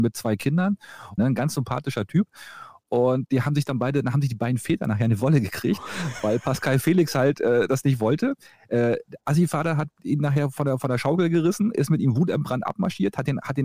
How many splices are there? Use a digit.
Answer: 1